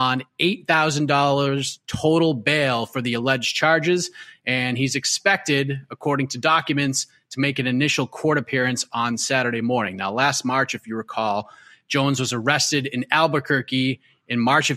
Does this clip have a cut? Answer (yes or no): no